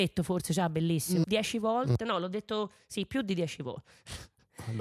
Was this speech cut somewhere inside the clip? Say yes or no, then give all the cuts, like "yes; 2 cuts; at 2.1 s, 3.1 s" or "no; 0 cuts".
yes; 1 cut; at 1.2 s